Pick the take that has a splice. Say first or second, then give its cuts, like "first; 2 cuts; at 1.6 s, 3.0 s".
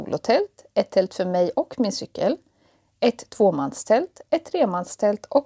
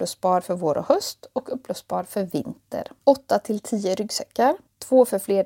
second; 1 cut; at 3.0 s